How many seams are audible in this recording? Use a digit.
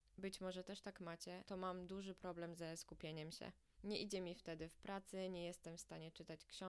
1